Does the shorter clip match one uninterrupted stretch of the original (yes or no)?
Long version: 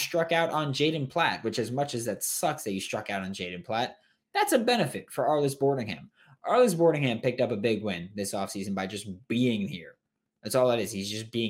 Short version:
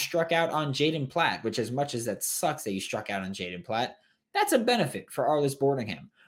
yes